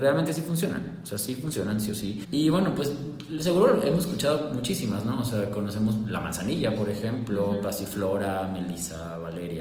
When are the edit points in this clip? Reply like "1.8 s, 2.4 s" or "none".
2.2 s